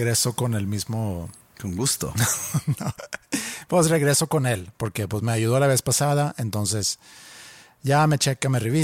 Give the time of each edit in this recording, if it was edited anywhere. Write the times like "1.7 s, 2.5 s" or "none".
none